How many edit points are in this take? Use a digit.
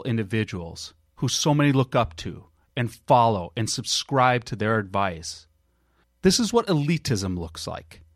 1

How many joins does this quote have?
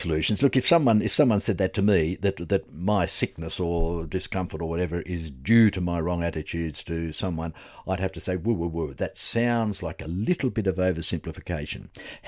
0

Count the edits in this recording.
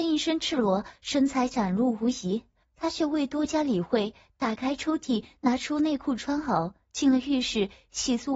1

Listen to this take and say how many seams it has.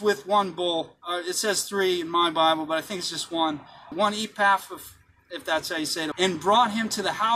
2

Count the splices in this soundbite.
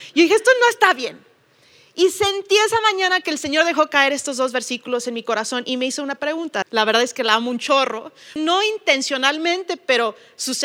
2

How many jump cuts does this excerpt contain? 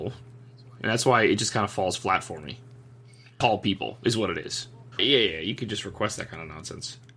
2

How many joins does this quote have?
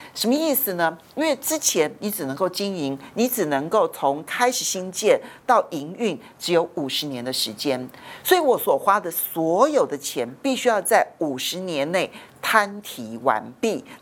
0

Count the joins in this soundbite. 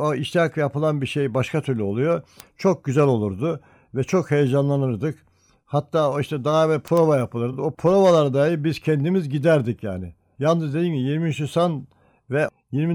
0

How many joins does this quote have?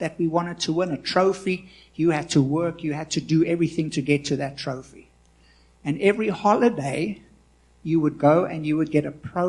0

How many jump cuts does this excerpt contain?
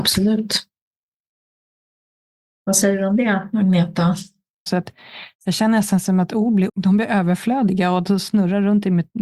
2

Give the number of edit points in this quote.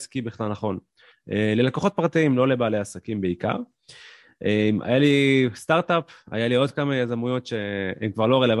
1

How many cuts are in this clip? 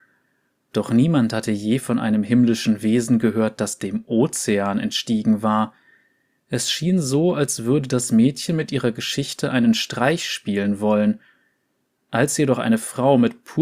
0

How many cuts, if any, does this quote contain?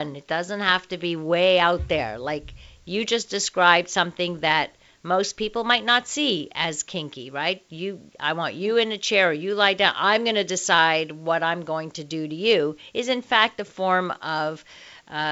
0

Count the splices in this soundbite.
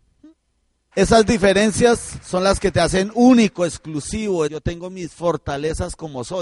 2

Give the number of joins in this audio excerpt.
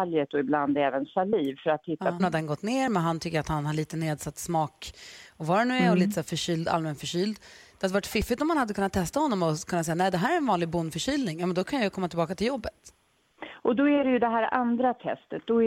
1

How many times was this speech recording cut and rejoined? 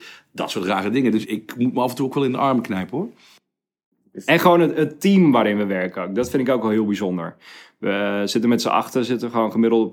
1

